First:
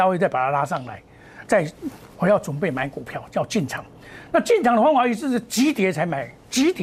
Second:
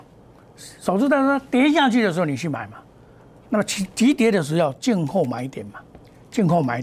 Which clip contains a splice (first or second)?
first